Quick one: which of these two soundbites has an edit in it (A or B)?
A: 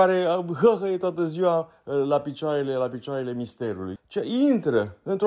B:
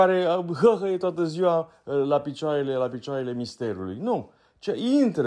A